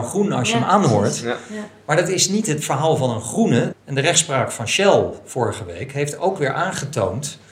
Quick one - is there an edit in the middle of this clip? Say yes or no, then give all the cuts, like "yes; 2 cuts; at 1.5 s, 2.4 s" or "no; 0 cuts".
yes; 1 cut; at 3.7 s